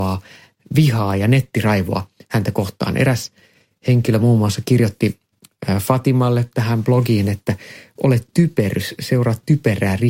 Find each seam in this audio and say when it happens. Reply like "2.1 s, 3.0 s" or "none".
none